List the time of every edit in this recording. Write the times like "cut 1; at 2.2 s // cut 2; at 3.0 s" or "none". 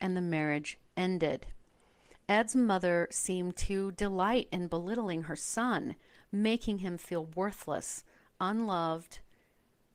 cut 1; at 2.1 s